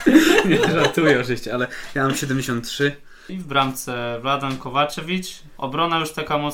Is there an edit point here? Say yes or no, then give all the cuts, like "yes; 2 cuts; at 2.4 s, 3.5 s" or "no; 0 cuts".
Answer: yes; 2 cuts; at 3.3 s, 5.6 s